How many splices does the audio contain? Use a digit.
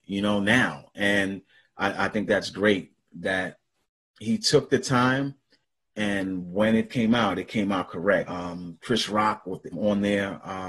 2